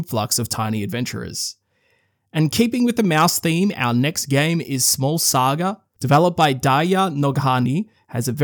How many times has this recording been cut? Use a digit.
0